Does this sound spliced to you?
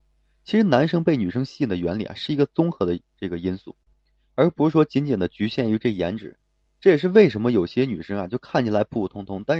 no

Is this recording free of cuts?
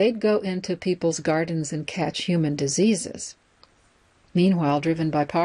yes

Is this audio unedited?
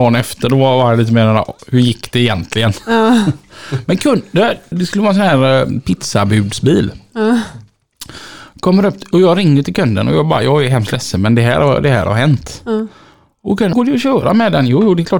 no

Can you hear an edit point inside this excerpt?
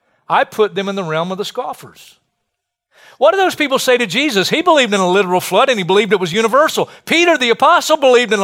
no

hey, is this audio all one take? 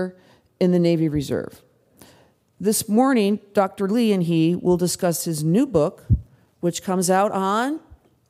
yes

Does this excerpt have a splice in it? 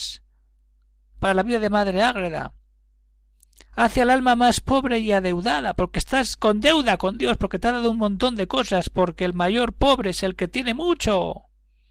no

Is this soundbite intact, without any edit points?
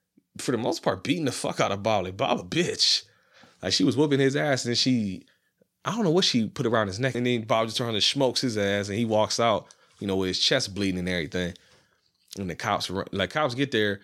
no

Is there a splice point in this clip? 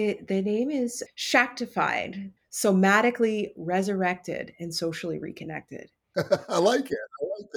yes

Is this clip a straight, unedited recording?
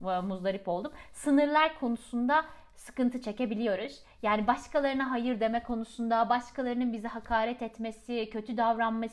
yes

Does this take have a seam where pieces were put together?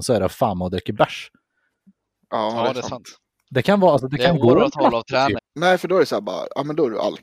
yes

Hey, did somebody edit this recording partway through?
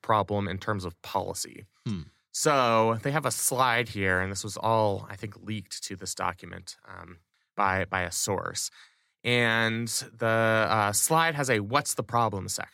no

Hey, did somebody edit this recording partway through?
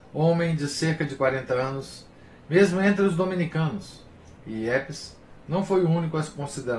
yes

